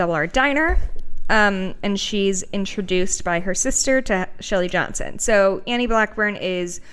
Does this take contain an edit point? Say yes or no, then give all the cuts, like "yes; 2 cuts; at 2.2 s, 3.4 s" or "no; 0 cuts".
no; 0 cuts